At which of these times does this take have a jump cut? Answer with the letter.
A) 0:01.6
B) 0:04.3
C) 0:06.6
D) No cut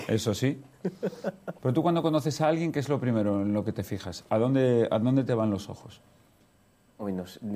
A